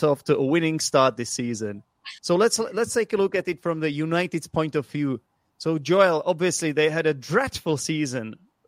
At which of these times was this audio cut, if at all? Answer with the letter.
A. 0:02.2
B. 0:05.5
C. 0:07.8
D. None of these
A